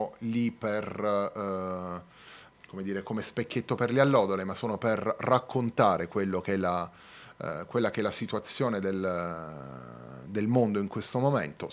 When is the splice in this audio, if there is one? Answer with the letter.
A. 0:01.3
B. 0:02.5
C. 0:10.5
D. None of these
B